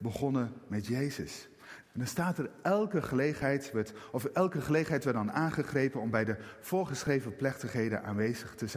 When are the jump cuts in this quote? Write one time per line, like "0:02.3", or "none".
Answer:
0:01.8